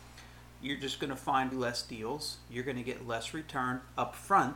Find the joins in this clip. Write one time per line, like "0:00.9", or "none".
0:01.5